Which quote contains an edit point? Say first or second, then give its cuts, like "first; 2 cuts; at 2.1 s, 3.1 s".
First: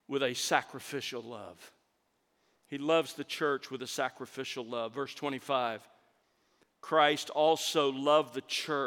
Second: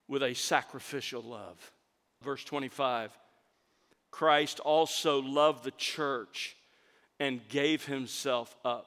second; 1 cut; at 2.2 s